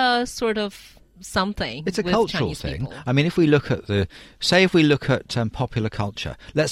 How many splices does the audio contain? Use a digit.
0